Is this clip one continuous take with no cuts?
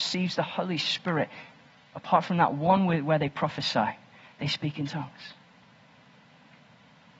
yes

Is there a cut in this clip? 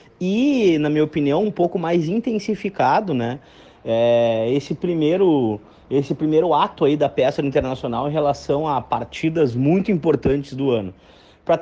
no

